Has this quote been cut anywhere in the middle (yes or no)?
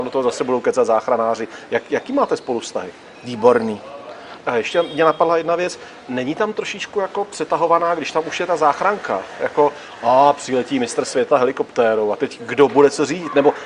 yes